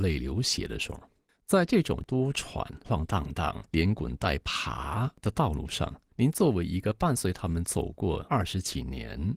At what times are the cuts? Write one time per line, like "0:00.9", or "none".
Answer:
0:02.8